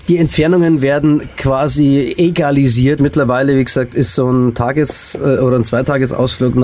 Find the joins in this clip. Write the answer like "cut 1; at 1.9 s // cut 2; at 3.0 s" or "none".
cut 1; at 3.0 s